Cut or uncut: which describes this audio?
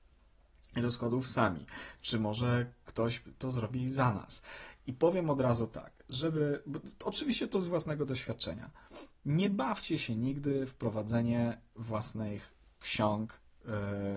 uncut